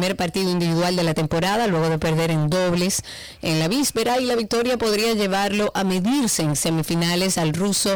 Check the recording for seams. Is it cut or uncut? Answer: uncut